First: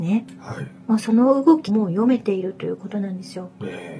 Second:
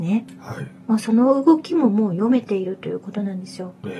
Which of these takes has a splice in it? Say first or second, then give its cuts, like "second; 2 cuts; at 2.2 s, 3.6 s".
first; 1 cut; at 1.7 s